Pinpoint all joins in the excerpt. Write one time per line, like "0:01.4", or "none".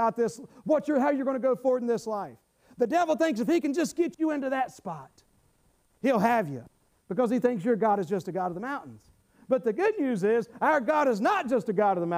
none